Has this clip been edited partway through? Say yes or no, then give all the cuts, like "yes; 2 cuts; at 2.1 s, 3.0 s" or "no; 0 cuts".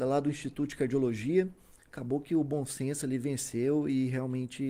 no; 0 cuts